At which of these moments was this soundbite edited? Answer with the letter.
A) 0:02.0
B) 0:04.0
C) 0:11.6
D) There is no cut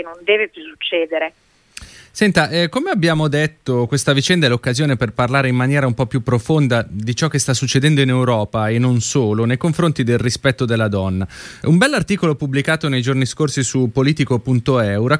D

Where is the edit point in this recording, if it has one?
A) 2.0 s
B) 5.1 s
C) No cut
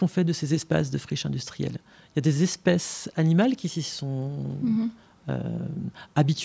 C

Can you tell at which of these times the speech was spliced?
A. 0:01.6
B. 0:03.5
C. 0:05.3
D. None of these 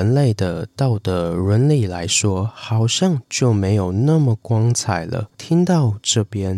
C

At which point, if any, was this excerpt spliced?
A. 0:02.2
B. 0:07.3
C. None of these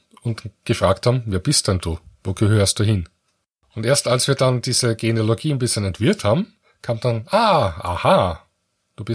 C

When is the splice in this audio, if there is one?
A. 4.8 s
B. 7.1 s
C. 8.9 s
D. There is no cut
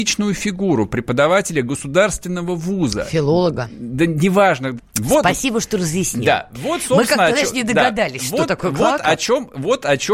A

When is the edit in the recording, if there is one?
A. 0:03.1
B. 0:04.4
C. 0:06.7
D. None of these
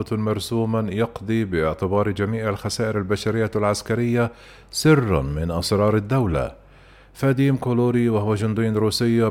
D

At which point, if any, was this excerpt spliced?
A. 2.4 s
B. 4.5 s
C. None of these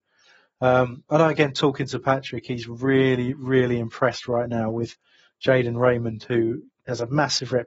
C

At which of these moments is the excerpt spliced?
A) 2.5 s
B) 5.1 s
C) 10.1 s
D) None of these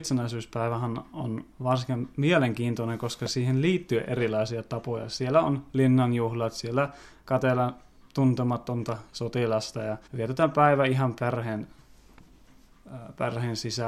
C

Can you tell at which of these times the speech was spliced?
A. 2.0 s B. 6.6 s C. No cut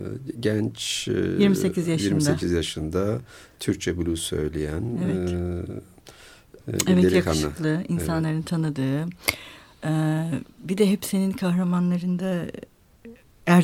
B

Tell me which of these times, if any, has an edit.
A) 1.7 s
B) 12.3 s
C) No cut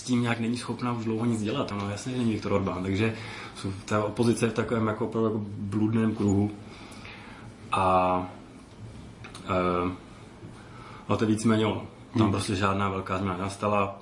A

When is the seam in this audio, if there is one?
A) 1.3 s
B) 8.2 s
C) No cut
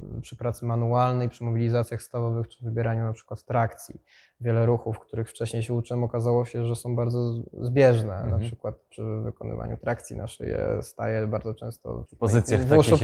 C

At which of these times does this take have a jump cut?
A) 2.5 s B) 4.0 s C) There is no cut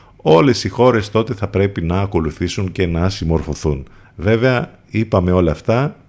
B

